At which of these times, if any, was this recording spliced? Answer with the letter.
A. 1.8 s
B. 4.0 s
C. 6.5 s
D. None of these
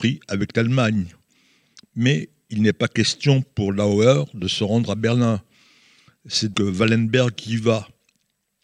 C